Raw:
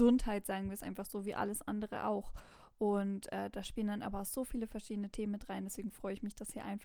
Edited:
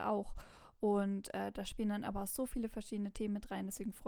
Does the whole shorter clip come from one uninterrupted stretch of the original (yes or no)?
yes